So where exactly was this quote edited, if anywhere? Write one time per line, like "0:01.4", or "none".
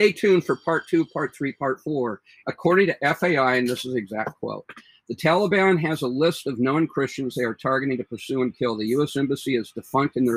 0:02.4